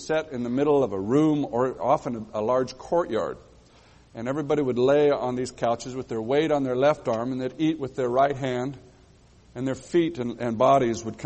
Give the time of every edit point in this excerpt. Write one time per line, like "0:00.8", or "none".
none